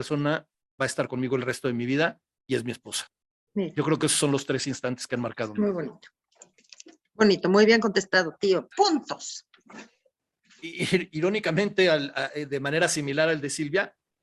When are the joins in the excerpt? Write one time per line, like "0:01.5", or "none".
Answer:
0:08.7
0:09.7